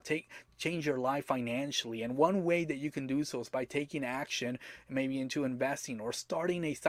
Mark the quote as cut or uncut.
uncut